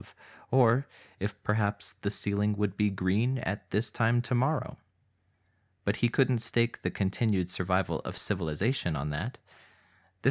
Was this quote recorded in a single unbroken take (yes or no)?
yes